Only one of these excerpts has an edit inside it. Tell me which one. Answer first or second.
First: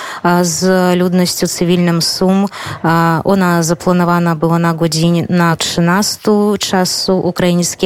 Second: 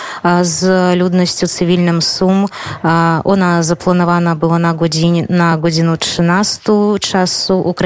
first